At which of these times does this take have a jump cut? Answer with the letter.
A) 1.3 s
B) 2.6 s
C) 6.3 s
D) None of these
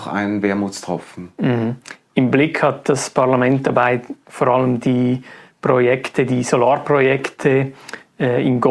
D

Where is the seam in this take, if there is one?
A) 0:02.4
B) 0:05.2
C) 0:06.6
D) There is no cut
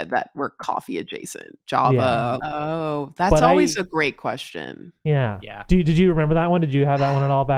A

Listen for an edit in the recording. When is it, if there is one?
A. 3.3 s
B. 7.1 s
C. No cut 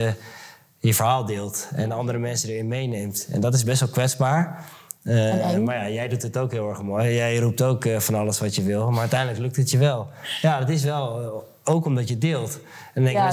C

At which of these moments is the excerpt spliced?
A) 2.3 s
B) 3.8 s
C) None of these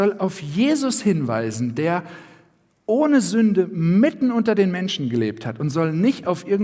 C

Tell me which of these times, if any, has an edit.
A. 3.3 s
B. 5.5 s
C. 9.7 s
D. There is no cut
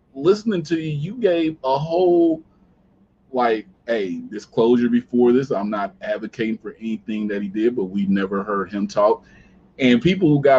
D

